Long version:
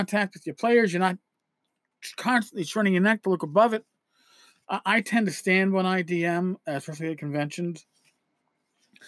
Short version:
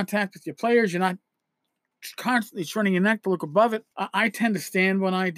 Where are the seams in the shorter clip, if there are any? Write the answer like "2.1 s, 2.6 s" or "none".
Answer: 3.9 s